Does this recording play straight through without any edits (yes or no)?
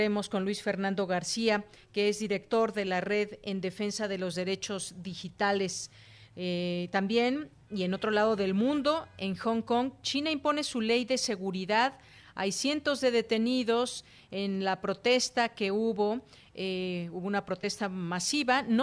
yes